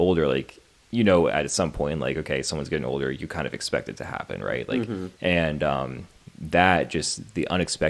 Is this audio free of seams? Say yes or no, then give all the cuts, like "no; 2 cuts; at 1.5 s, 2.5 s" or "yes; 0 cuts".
no; 1 cut; at 5.1 s